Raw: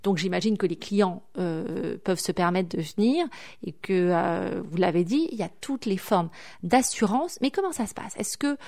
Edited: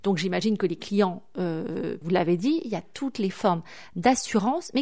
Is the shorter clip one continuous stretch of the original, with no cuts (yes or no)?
no